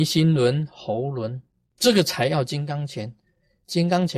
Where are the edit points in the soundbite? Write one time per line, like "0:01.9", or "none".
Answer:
0:01.7